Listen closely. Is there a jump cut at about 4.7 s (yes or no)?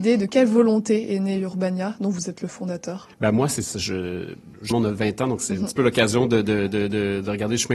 yes